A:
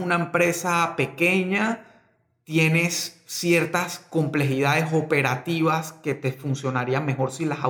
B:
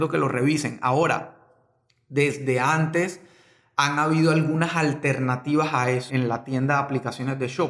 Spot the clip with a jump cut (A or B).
B